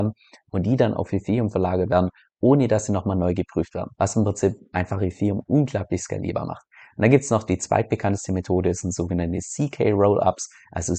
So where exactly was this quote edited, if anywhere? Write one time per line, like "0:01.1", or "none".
0:03.9